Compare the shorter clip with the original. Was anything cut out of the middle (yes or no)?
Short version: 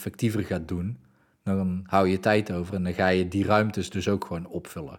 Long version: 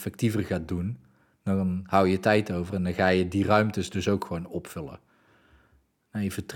no